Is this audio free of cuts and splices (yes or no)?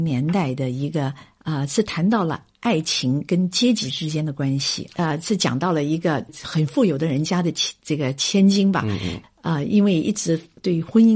yes